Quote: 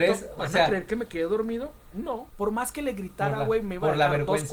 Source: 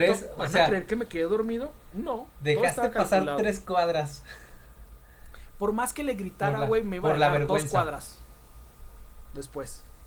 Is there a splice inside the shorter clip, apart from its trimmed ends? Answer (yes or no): yes